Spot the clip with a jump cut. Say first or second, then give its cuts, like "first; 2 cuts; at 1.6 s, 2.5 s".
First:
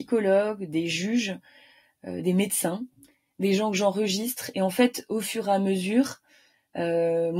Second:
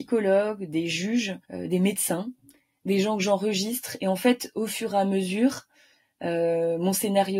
second; 1 cut; at 1.4 s